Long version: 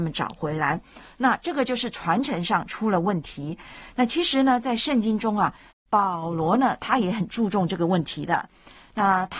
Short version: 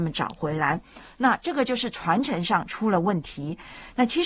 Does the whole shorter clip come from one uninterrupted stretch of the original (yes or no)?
yes